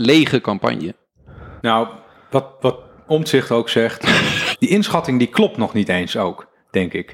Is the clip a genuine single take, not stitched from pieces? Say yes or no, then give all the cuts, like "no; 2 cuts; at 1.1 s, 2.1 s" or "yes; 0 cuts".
no; 2 cuts; at 1.6 s, 4.5 s